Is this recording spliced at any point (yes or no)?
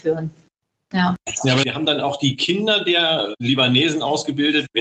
no